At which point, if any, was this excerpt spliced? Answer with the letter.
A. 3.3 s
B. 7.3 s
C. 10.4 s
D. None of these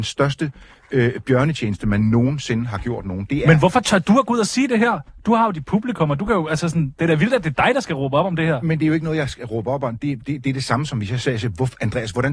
D